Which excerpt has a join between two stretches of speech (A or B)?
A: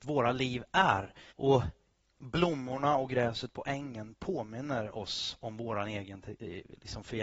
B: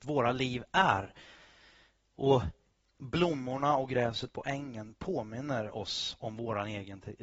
A